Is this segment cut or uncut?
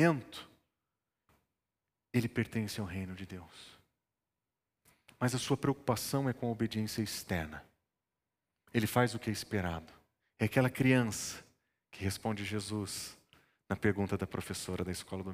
cut